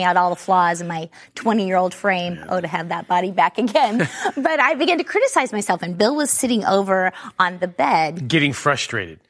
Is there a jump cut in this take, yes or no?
no